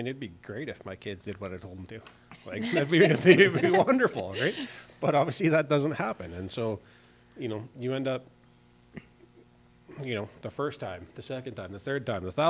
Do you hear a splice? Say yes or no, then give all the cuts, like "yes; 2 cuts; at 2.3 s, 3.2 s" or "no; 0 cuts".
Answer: no; 0 cuts